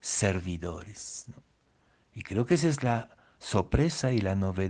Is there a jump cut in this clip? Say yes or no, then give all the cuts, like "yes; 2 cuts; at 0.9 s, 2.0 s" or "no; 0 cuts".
no; 0 cuts